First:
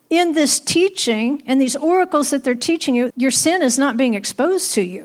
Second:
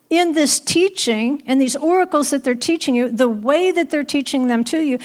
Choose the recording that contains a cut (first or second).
first